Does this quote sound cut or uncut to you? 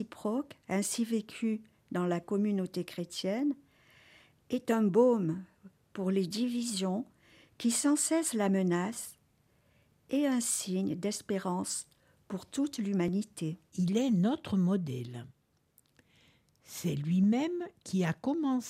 cut